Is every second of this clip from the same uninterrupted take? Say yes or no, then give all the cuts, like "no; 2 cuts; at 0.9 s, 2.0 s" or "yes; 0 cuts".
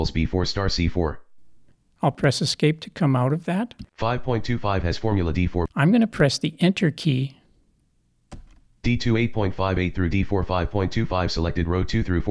no; 1 cut; at 5.7 s